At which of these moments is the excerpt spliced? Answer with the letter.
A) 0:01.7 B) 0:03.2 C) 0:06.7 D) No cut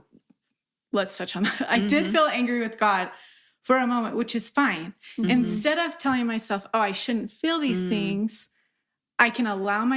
D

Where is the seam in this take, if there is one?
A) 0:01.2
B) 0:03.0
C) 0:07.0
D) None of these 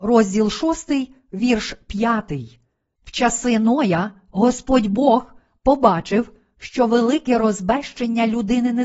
B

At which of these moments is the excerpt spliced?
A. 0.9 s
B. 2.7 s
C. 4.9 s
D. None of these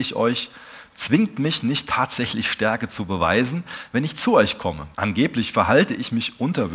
C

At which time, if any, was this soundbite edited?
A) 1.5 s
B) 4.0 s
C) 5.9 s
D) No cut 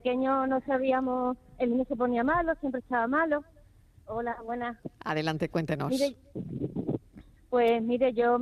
B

